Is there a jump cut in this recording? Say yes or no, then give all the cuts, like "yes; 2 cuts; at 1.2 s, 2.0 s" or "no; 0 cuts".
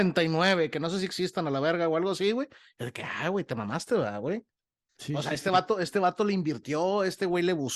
no; 0 cuts